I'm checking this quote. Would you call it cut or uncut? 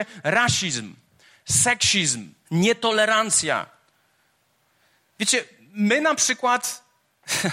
cut